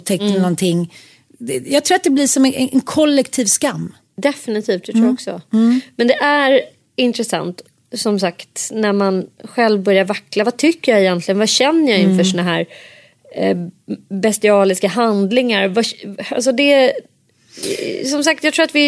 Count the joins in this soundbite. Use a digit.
0